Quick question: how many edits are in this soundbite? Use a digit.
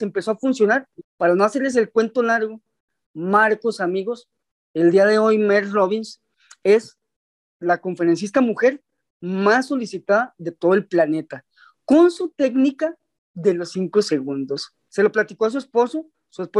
2